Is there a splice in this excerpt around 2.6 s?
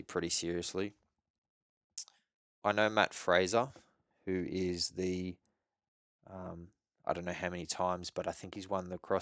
yes; 1 cut; at 2.6 s

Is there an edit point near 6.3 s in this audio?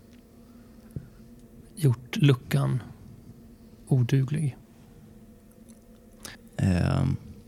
yes; 1 cut; at 6.3 s

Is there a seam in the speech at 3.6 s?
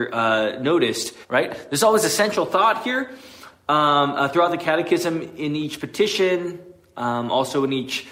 no; 1 cut; at 1.2 s

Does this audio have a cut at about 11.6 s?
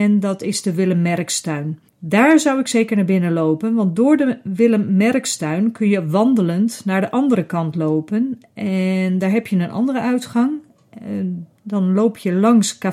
yes; 2 cuts; at 1.9 s, 11.6 s

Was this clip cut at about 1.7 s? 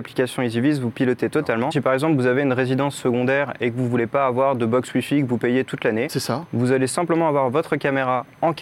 yes; 1 cut; at 1.7 s

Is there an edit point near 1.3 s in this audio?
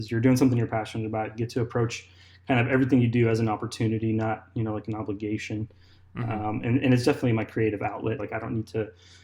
no; 1 cut; at 8.2 s

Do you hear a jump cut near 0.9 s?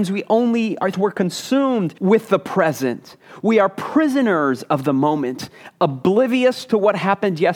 yes; 1 cut; at 0.9 s

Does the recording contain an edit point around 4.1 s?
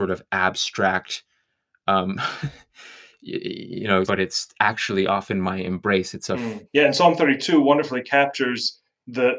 yes; 2 cuts; at 4.1 s, 6.7 s

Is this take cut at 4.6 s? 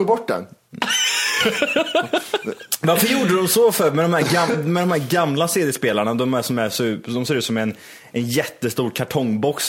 no; 0 cuts

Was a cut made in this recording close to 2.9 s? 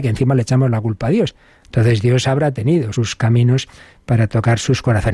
yes; 2 cuts; at 1.6 s, 2.9 s

